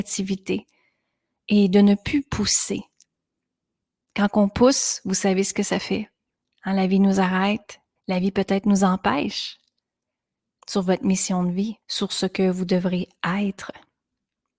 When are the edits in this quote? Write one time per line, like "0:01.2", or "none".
0:08.0
0:10.6
0:11.8